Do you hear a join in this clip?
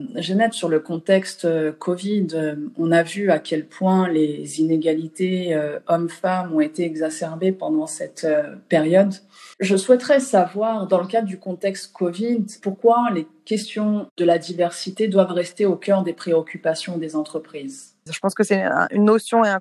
yes; 2 cuts; at 9.5 s, 18.1 s

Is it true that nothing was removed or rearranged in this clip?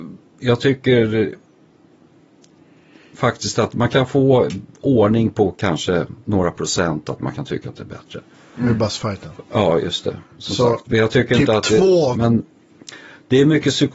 no; 1 cut; at 12.1 s

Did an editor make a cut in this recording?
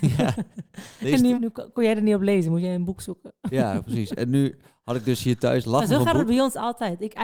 yes; 1 cut; at 1.3 s

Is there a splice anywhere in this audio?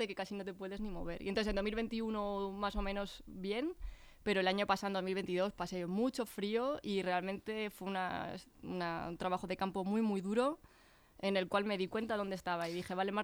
no; 0 cuts

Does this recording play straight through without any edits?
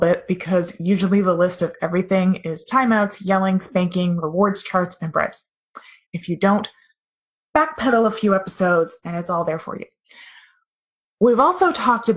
no; 1 cut; at 6.0 s

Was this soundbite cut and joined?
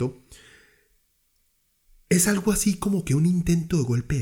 no; 0 cuts

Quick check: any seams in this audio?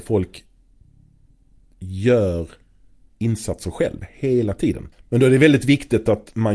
yes; 1 cut; at 4.9 s

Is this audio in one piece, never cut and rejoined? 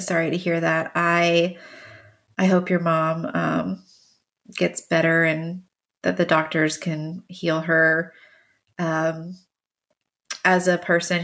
yes; 0 cuts

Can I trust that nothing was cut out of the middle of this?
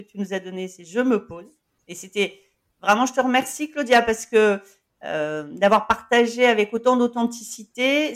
no; 1 cut; at 1.8 s

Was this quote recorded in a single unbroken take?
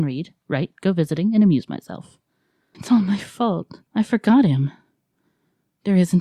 no; 2 cuts; at 2.7 s, 3.9 s

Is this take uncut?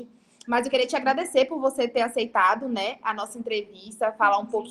yes; 0 cuts

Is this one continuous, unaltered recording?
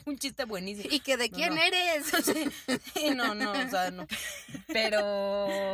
yes; 0 cuts

